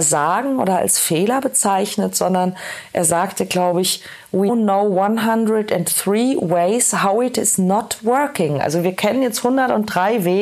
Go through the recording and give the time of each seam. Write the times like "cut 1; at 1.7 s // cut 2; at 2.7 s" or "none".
cut 1; at 4.5 s

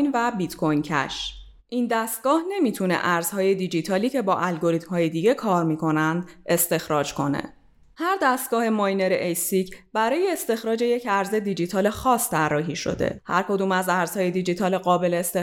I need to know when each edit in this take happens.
cut 1; at 7.9 s

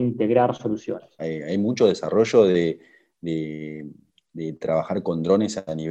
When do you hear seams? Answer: cut 1; at 1.2 s

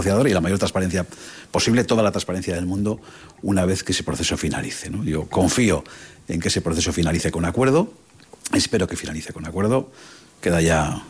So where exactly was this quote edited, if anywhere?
none

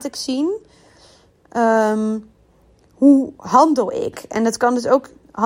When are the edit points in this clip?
none

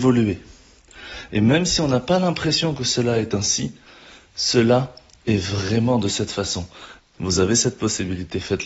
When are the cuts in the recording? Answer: cut 1; at 7.0 s

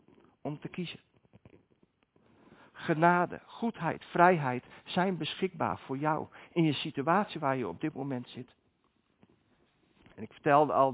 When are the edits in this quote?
none

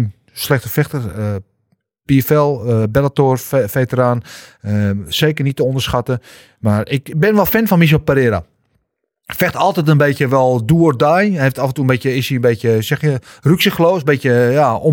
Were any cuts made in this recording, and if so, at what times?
none

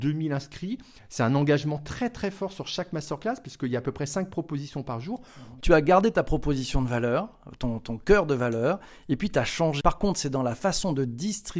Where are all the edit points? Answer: cut 1; at 5.6 s // cut 2; at 9.8 s

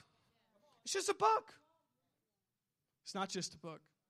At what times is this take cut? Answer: none

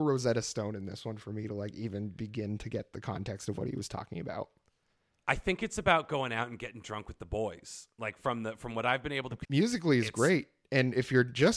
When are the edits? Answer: cut 1; at 9.4 s

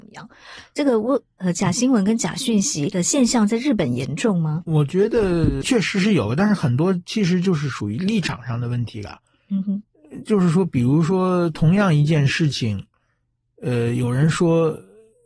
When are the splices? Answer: none

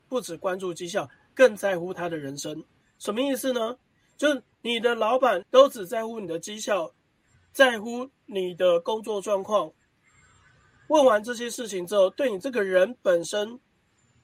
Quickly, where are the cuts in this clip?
cut 1; at 2.8 s // cut 2; at 5.4 s

